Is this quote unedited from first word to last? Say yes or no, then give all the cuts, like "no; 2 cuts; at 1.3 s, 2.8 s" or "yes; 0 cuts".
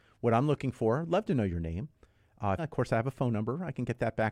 no; 1 cut; at 2.6 s